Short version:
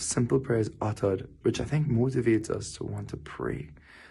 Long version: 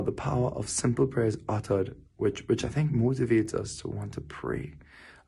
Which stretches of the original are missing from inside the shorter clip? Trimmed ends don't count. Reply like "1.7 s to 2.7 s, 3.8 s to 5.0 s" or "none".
2.1 s to 2.4 s